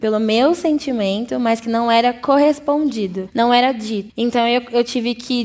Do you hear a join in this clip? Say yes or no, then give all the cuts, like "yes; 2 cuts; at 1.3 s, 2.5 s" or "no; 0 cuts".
yes; 1 cut; at 4.1 s